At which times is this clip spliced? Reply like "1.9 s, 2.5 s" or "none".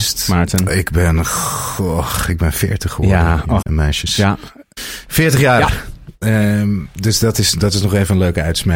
3.6 s